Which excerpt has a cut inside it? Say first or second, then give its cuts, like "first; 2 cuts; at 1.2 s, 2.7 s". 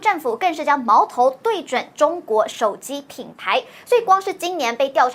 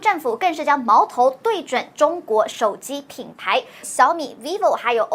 second; 1 cut; at 3.8 s